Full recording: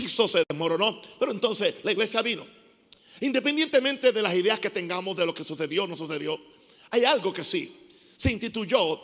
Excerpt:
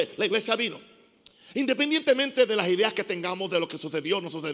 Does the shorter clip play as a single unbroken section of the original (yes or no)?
yes